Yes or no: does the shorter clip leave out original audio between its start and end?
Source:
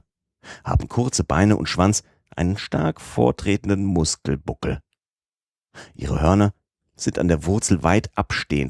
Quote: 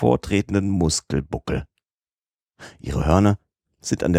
no